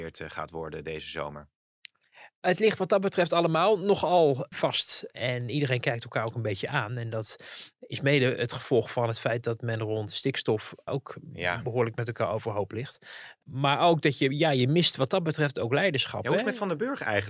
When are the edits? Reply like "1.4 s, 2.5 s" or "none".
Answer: none